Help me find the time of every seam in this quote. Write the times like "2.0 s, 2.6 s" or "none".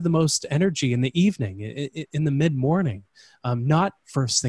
none